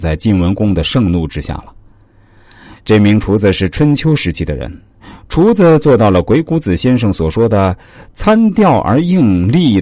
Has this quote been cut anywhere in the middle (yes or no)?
no